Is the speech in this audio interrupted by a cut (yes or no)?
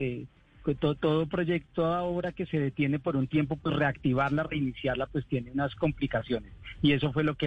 no